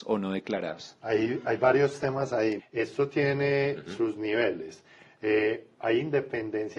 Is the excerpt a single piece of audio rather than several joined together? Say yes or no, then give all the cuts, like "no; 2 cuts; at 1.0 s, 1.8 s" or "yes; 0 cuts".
no; 1 cut; at 2.6 s